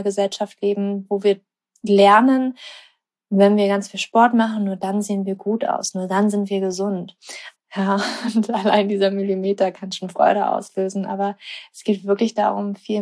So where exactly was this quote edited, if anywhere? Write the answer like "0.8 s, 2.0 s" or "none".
7.5 s